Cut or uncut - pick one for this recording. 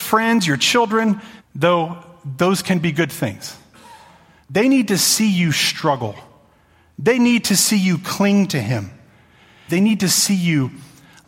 cut